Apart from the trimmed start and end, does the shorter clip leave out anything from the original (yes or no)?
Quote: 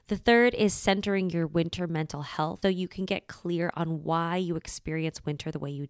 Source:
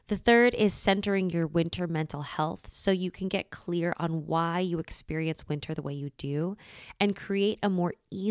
yes